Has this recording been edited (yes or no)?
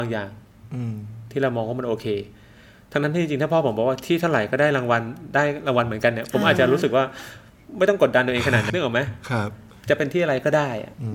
yes